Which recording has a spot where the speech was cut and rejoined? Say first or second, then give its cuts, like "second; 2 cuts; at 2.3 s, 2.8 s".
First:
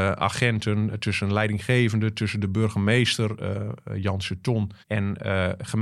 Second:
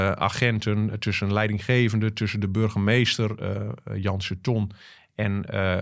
first; 1 cut; at 4.8 s